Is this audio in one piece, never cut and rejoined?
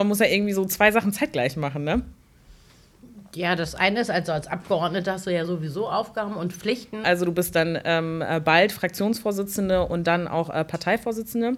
no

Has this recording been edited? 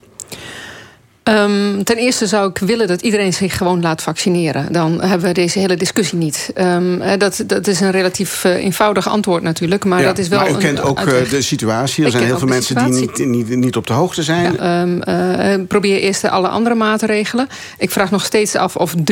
yes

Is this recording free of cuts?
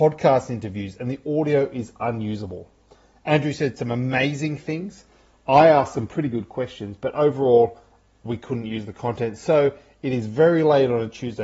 yes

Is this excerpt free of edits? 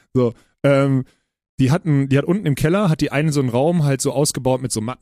yes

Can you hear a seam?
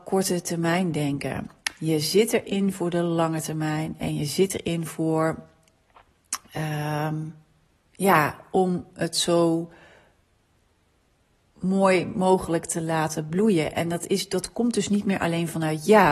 no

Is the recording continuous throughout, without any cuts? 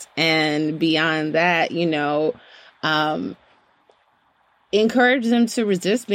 yes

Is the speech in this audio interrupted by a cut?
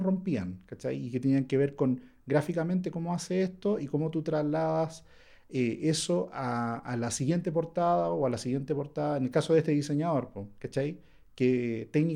no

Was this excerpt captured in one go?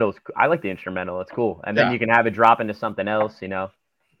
yes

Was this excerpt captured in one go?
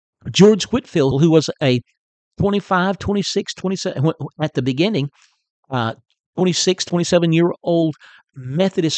no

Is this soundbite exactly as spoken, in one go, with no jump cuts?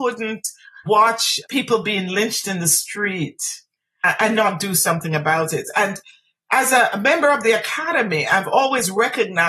yes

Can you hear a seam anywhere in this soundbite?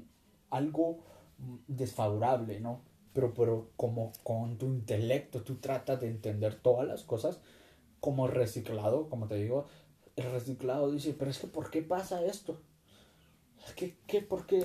yes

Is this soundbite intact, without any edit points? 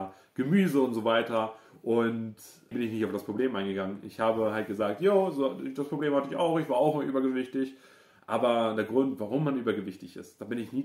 no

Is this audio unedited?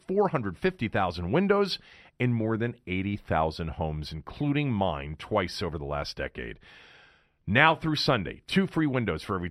yes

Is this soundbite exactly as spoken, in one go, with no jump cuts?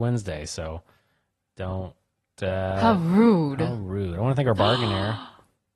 yes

